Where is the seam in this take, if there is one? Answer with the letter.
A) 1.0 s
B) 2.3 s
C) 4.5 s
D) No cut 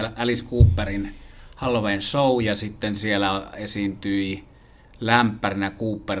D